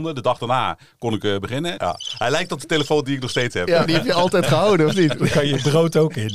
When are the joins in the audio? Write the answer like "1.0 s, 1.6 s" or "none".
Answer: 1.8 s, 3.9 s